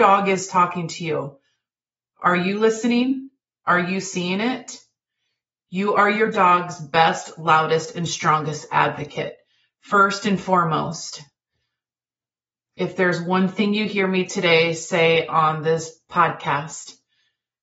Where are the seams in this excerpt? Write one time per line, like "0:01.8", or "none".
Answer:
none